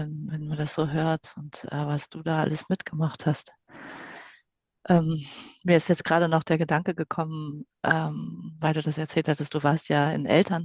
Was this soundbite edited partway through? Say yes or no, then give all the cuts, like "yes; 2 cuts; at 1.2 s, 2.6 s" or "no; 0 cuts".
no; 0 cuts